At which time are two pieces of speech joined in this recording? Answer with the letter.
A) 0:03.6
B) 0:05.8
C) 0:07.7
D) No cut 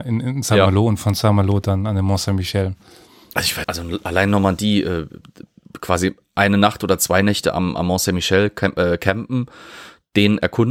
A